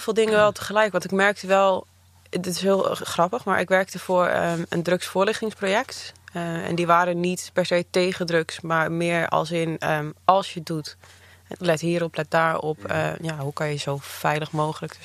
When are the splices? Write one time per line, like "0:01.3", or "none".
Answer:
none